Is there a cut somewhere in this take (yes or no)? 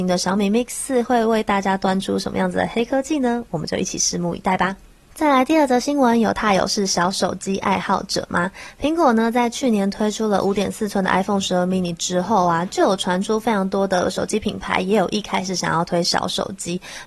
no